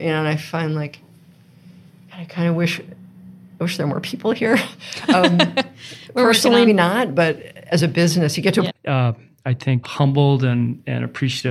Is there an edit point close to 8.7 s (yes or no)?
yes